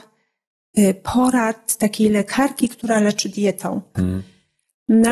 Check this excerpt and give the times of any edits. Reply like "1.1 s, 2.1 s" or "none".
3.9 s